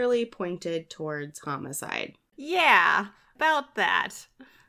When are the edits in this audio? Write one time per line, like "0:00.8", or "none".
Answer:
0:02.3